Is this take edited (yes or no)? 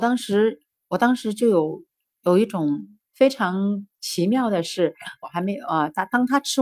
yes